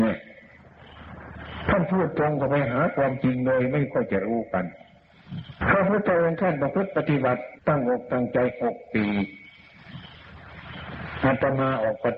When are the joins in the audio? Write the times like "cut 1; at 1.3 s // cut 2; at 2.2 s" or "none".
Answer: cut 1; at 7.6 s